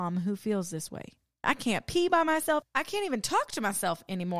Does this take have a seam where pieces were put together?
yes; 2 cuts; at 1.4 s, 2.6 s

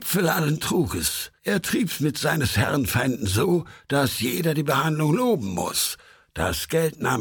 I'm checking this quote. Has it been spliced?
yes; 1 cut; at 1.4 s

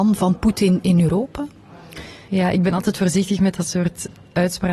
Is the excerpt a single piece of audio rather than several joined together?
yes; 0 cuts

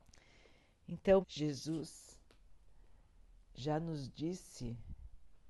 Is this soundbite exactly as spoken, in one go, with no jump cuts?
no; 1 cut; at 1.2 s

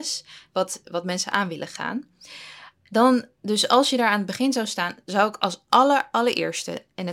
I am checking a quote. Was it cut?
no; 0 cuts

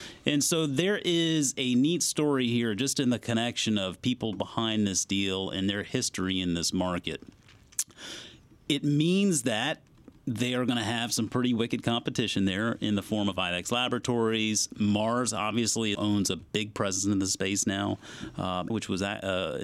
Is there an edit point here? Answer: yes; 2 cuts; at 16.0 s, 18.7 s

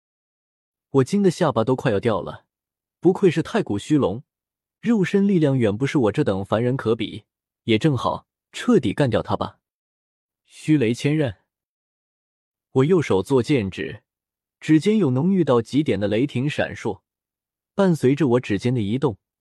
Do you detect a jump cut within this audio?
no; 0 cuts

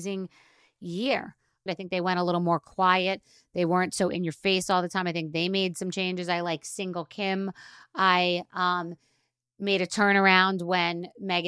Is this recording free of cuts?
no; 1 cut; at 1.7 s

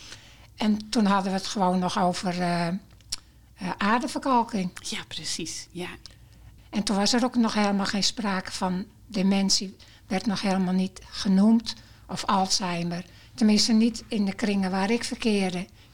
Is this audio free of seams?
no; 1 cut; at 6.6 s

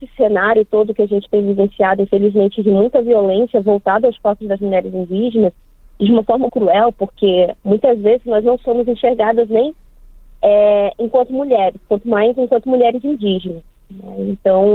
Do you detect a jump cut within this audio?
yes; 1 cut; at 6.5 s

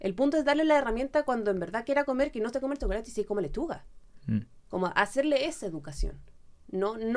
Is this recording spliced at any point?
no; 0 cuts

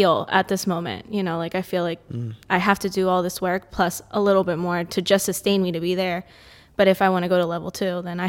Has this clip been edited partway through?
no; 0 cuts

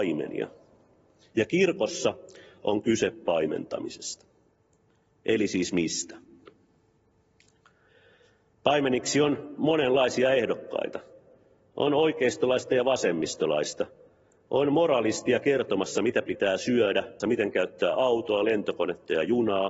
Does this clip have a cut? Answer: yes; 2 cuts; at 8.5 s, 17.2 s

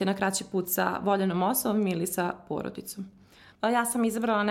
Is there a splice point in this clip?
yes; 1 cut; at 3.5 s

